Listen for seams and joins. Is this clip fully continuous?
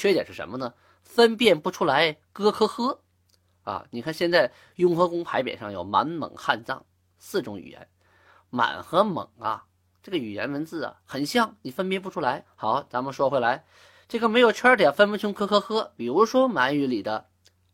no; 1 cut; at 12.5 s

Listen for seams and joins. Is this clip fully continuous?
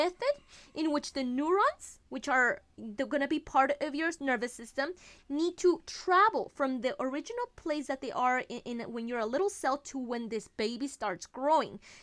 yes; 0 cuts

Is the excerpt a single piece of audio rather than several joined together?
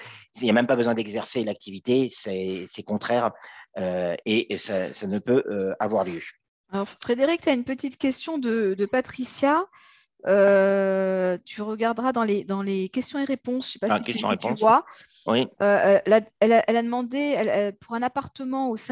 yes; 0 cuts

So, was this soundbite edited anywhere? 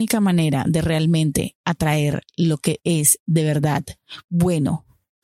no; 0 cuts

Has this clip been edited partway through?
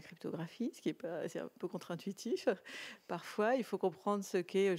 no; 0 cuts

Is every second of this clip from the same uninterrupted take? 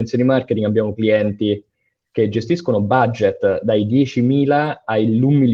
yes; 0 cuts

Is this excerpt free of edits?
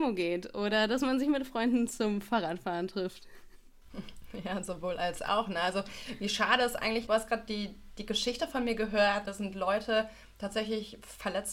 yes; 0 cuts

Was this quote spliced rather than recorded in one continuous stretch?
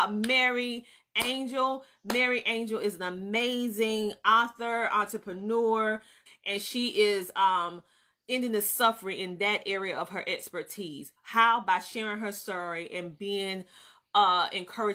yes; 1 cut; at 6.3 s

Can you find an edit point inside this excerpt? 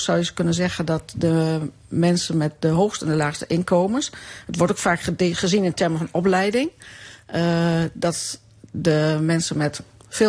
no; 0 cuts

